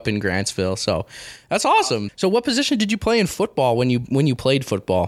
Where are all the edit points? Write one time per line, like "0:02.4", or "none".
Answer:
0:02.1